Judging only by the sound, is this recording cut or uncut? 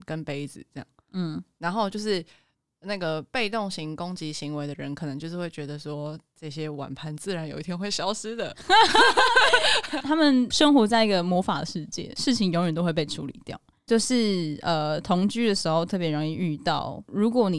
uncut